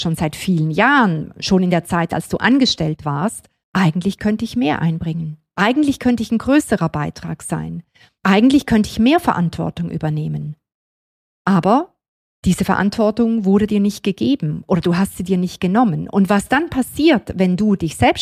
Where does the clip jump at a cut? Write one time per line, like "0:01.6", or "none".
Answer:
0:03.6